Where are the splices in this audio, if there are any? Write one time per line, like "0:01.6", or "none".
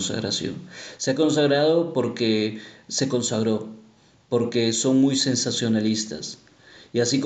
none